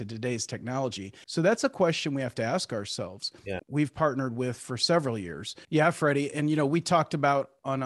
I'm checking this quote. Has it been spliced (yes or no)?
yes